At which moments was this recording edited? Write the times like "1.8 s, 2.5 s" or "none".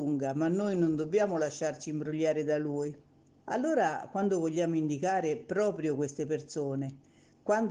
3.4 s